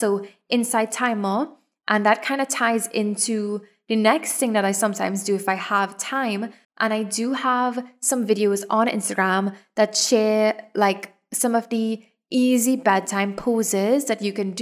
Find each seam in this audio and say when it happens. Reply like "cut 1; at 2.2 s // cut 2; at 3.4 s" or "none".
cut 1; at 6.6 s